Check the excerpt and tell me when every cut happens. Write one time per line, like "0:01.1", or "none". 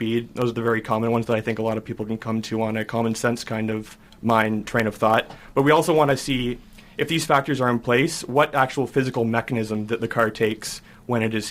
0:04.1